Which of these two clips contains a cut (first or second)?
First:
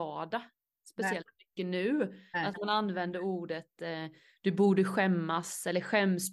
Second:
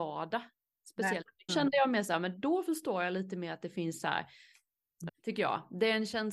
second